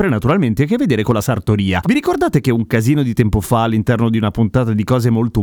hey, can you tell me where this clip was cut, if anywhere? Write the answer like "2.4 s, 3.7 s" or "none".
1.8 s